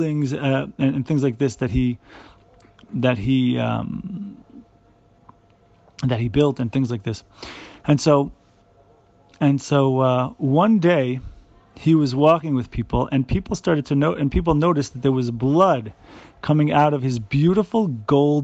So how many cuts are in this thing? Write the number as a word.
zero